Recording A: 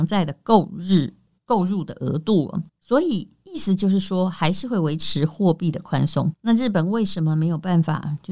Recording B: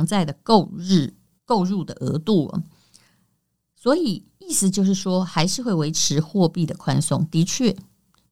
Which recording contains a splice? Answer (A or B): A